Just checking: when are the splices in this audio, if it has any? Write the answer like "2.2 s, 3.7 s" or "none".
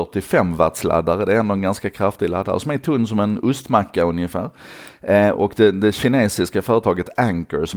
5.3 s